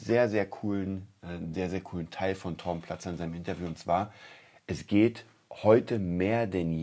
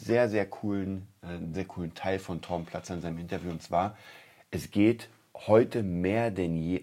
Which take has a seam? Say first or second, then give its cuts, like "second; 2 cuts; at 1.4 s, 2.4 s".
second; 1 cut; at 1.5 s